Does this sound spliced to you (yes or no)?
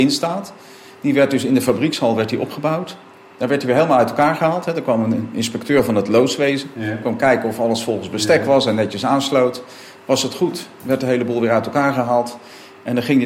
no